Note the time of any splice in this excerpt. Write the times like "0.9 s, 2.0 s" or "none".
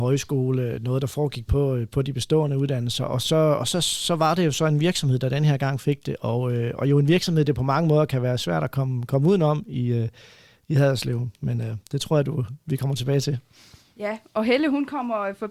none